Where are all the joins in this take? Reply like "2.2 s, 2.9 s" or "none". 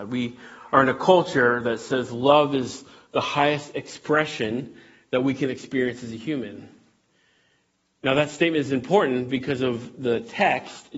none